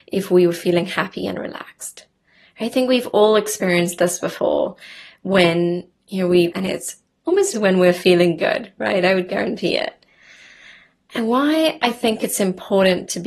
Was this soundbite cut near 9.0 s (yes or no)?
no